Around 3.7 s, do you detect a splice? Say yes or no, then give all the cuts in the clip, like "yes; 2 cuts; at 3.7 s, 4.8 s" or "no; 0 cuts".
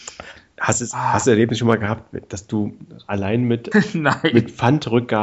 yes; 1 cut; at 3.7 s